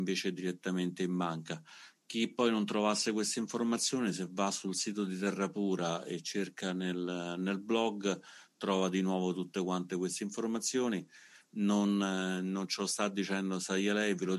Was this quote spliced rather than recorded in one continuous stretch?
no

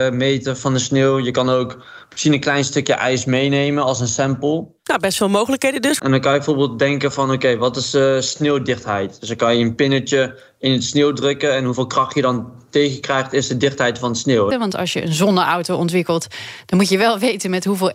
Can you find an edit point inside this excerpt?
yes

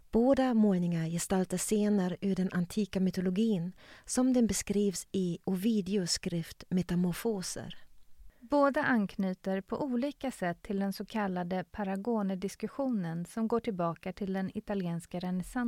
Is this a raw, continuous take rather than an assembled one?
yes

